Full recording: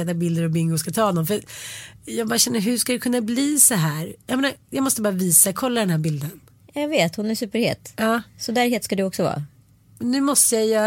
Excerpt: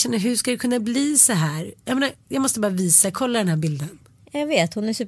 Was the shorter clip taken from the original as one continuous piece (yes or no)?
yes